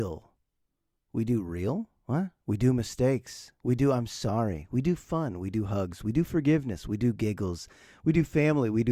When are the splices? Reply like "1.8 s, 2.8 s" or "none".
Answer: none